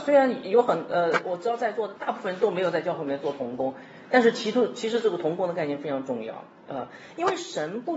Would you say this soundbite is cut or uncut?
cut